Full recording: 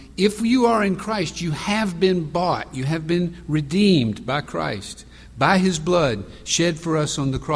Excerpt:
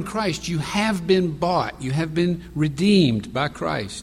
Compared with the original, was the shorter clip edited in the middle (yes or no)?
no